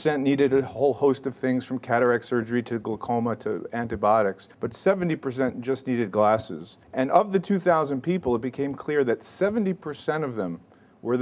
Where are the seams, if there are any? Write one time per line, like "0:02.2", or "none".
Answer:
0:04.5
0:06.8